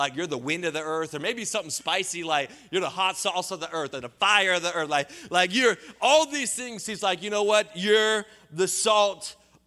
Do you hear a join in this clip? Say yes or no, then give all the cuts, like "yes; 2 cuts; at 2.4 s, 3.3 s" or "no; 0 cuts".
no; 0 cuts